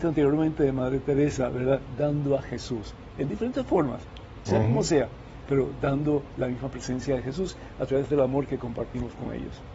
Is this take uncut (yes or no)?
yes